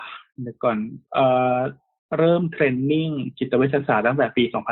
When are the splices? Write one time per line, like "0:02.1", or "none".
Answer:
0:01.0